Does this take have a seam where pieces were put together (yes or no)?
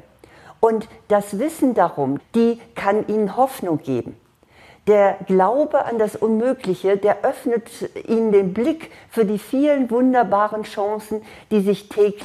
yes